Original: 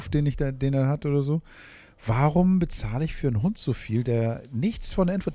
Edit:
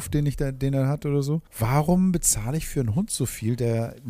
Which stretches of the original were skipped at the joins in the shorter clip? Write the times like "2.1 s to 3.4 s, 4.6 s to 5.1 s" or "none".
1.5 s to 1.9 s

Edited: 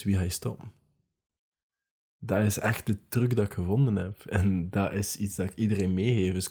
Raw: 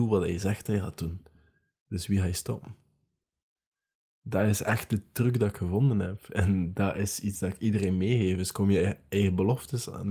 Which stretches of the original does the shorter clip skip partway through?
none

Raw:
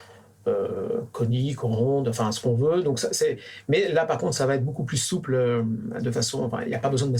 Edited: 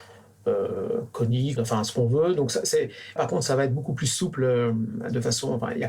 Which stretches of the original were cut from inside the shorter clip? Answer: 1.6 s to 2.0 s, 3.6 s to 4.1 s

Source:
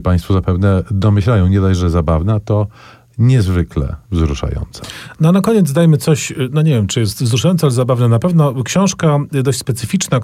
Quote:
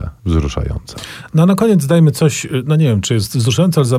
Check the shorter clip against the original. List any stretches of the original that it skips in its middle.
none

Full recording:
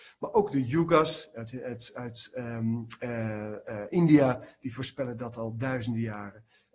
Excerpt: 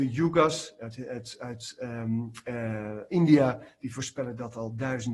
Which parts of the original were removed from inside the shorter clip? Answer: 3.6 s to 3.9 s

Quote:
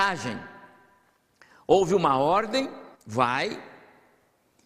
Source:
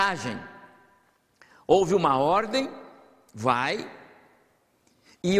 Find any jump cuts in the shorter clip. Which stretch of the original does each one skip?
2.9 s to 3.2 s

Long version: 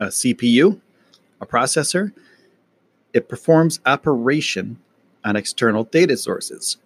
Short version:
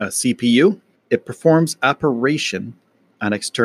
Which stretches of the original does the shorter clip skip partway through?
0.9 s to 3.0 s

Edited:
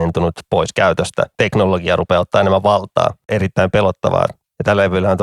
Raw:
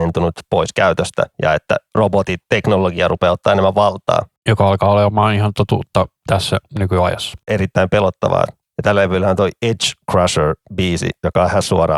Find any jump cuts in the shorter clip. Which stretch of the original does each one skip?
1.3 s to 2.5 s, 4.3 s to 7.4 s

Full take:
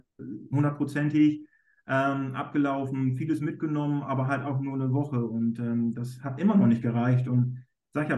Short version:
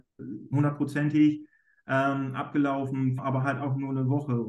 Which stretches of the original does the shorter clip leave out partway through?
3.2 s to 4.0 s

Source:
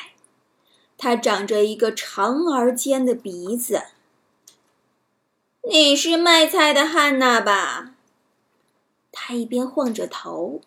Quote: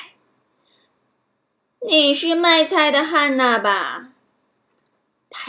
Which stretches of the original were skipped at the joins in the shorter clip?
0.9 s to 4.7 s

